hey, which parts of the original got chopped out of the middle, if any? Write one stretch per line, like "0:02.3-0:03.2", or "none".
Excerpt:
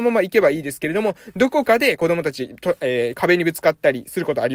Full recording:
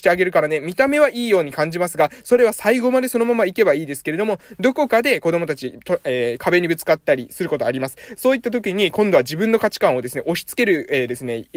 none